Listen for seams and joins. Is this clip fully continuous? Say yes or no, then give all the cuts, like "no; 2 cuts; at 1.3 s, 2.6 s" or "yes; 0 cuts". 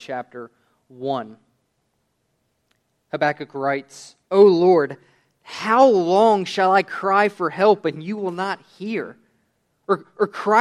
no; 1 cut; at 4.2 s